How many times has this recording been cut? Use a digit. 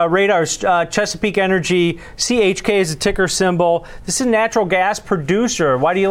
0